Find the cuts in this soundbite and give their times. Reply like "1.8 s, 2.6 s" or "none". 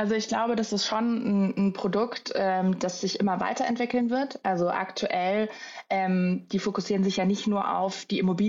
none